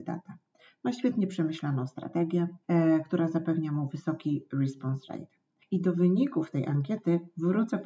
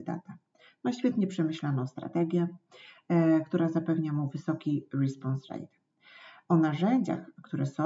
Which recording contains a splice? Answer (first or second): first